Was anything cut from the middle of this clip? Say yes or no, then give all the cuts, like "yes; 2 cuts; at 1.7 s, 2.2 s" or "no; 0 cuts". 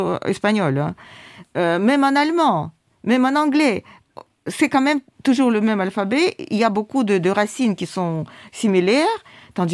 no; 0 cuts